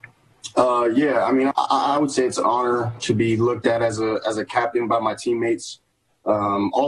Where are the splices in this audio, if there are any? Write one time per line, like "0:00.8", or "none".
0:01.5